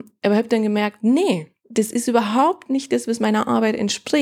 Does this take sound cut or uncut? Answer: uncut